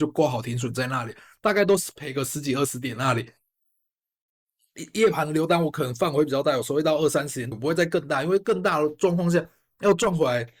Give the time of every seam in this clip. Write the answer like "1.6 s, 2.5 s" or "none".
7.5 s